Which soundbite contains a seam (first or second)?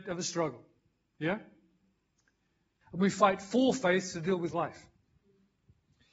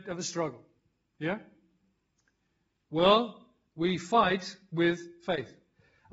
first